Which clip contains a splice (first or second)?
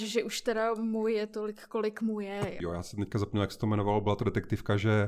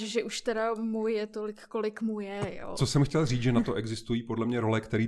first